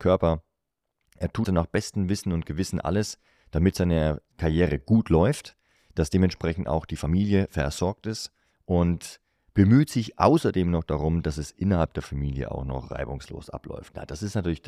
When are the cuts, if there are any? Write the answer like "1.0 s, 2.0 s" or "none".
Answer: 1.4 s